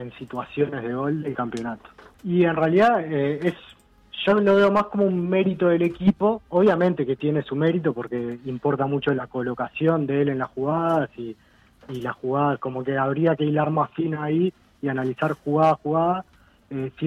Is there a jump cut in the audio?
yes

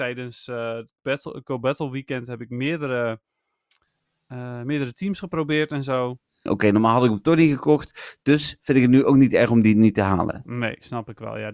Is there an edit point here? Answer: yes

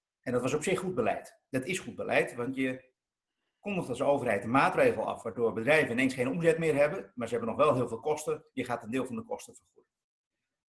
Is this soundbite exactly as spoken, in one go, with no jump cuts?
yes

